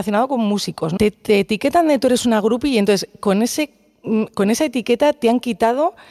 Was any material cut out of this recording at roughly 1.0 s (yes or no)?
yes